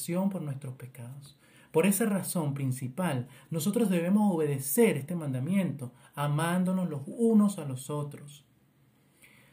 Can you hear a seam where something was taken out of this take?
no; 0 cuts

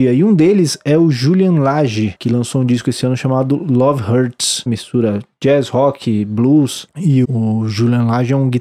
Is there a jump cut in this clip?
yes; 2 cuts; at 4.7 s, 7.2 s

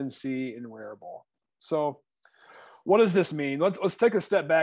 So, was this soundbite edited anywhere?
no; 0 cuts

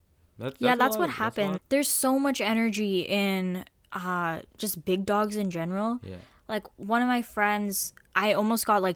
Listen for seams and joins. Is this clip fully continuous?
no; 1 cut; at 1.6 s

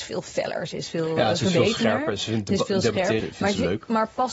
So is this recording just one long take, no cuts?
no; 1 cut; at 3.2 s

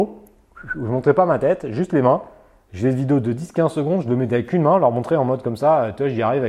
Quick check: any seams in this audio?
no; 0 cuts

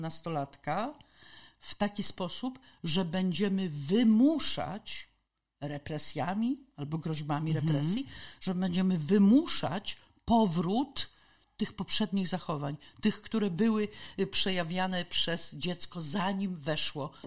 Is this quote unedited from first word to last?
yes; 0 cuts

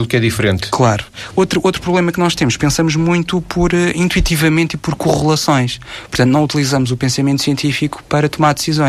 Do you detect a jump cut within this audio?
no; 0 cuts

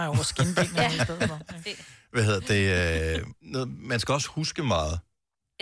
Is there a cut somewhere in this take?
yes; 1 cut; at 3.4 s

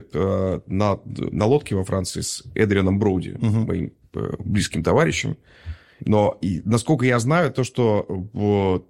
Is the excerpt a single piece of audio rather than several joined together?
no; 1 cut; at 6.0 s

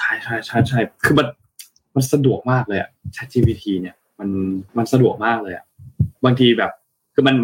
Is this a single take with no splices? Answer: no; 1 cut; at 4.7 s

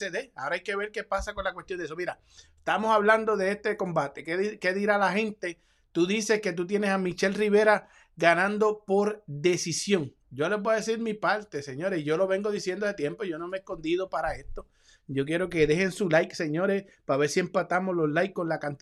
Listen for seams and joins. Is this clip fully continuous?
yes; 0 cuts

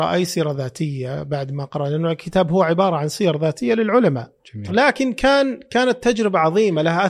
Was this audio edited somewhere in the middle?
yes; 1 cut; at 4.7 s

